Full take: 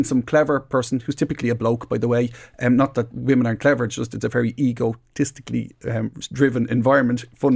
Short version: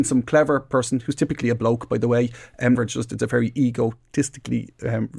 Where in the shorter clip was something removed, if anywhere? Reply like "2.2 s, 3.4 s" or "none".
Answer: 2.7 s